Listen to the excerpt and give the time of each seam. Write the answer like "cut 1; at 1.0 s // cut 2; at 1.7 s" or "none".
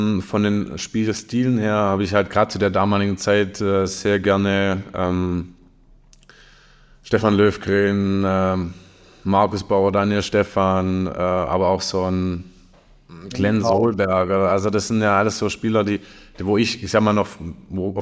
none